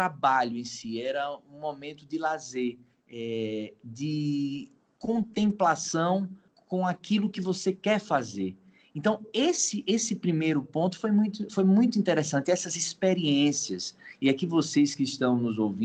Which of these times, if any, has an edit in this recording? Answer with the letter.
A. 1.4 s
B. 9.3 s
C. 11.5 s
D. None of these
D